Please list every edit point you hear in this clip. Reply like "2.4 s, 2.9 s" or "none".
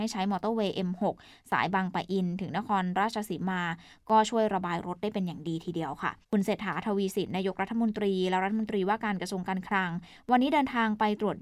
6.2 s